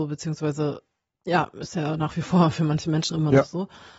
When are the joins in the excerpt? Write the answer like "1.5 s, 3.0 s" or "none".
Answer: 3.1 s